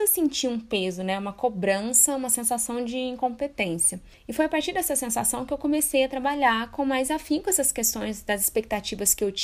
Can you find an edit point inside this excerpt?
no; 0 cuts

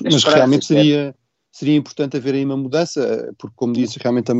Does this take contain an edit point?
no; 0 cuts

